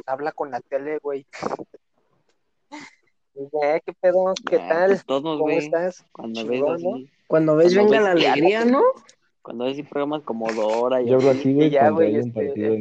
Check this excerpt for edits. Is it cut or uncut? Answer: uncut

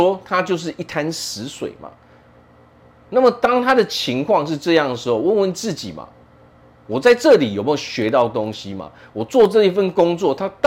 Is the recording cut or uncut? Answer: uncut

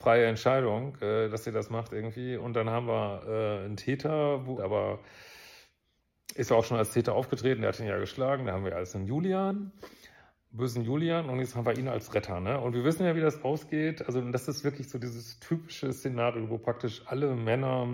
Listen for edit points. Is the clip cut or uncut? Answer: cut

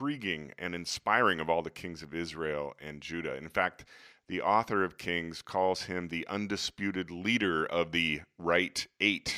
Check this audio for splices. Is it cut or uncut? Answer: uncut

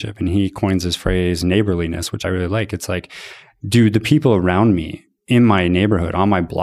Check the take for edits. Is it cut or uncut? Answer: uncut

